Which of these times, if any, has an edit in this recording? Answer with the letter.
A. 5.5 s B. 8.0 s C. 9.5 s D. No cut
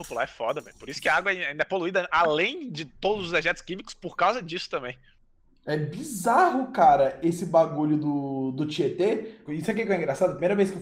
C